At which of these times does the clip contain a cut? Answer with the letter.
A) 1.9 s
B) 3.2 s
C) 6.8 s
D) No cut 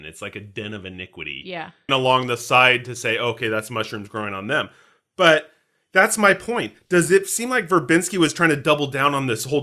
A